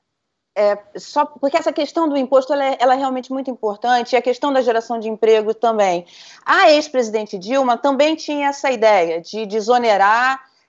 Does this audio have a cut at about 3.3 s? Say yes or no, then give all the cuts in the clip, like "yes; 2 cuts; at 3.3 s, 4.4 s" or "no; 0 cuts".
no; 0 cuts